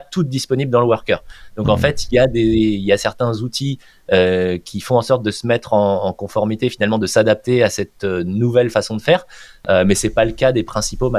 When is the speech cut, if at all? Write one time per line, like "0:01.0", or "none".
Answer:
none